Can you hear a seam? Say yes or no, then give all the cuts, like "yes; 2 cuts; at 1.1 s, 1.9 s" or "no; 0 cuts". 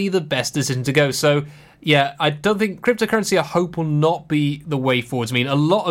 no; 0 cuts